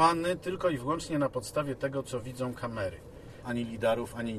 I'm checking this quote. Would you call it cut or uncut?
cut